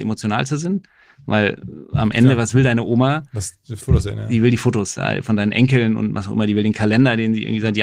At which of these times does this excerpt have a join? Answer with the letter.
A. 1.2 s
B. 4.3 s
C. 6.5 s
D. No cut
D